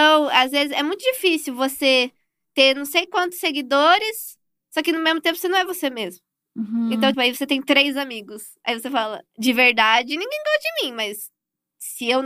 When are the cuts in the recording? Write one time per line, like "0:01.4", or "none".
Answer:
0:07.1
0:09.3